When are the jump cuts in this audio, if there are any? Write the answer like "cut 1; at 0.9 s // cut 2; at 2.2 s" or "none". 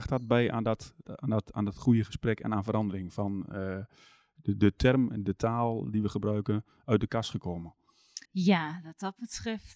cut 1; at 8.2 s